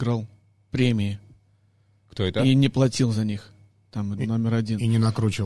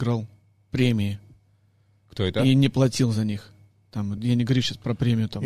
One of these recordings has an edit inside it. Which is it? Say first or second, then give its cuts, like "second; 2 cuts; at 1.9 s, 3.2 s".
first; 1 cut; at 4.2 s